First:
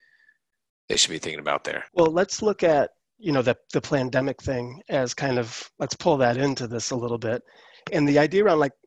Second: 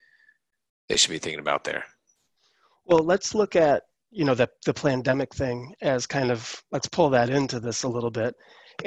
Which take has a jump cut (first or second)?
first